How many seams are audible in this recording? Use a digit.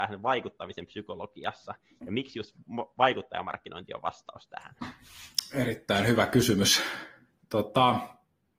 0